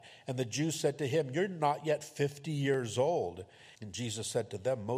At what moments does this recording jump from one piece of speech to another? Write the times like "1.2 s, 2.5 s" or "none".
3.7 s